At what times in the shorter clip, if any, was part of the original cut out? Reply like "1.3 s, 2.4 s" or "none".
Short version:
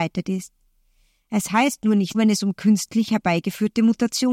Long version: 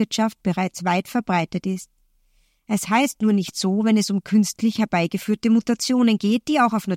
2.1 s